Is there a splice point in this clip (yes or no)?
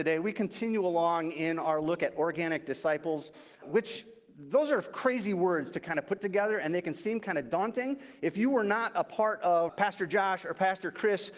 yes